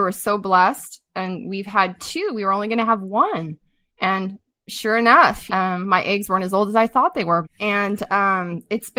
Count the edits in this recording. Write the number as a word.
two